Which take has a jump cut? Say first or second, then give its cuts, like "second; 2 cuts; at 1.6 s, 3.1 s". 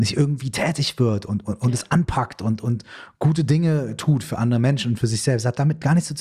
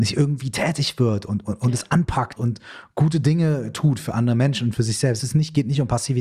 second; 2 cuts; at 2.4 s, 5.2 s